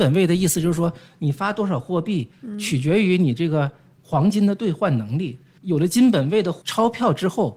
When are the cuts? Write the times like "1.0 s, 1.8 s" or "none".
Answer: 5.5 s